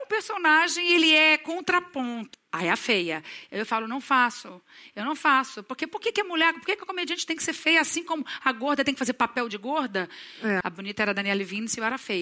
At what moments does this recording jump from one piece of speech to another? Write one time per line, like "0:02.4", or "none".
0:02.3
0:10.6